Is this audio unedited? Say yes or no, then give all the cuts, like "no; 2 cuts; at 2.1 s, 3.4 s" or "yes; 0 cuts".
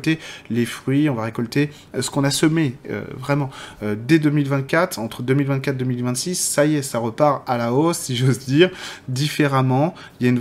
yes; 0 cuts